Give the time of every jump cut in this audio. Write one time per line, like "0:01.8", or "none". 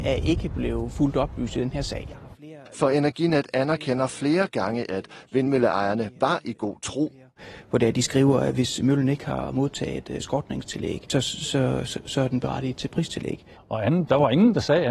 0:13.5